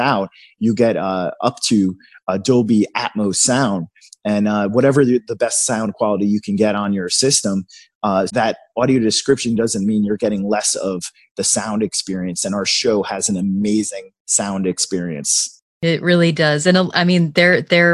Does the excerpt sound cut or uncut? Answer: cut